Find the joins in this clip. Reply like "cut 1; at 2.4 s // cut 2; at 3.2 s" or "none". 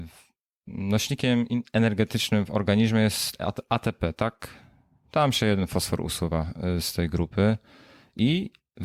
cut 1; at 5.0 s